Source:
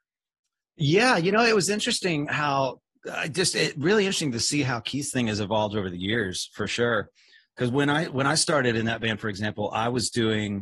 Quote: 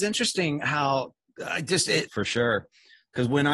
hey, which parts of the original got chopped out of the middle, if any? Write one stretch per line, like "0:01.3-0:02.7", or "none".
0:03.7-0:06.5